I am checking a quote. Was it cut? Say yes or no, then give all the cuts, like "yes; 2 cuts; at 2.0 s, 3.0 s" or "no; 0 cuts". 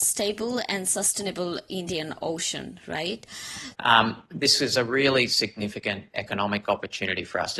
yes; 1 cut; at 3.7 s